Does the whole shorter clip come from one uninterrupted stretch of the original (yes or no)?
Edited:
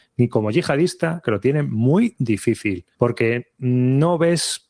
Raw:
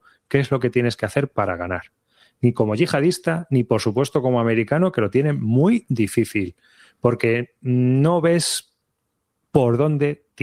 no